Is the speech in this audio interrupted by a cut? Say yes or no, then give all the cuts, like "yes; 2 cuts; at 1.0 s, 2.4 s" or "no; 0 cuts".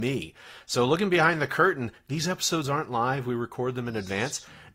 no; 0 cuts